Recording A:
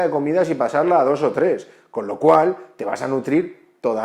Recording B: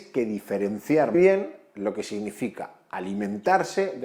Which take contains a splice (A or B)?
B